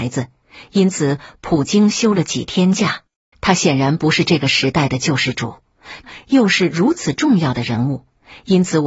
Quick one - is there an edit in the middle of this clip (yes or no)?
yes